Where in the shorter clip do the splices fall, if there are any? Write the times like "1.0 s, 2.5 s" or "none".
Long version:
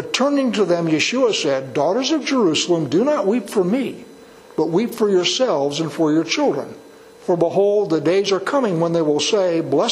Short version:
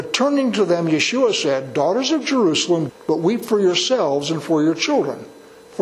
2.9 s